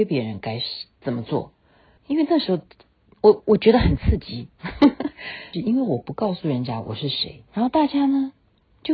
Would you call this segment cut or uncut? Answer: cut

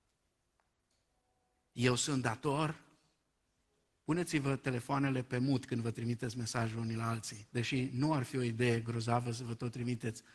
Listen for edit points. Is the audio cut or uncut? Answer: uncut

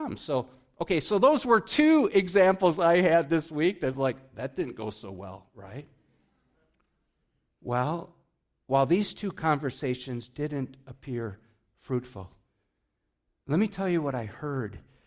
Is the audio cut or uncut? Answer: uncut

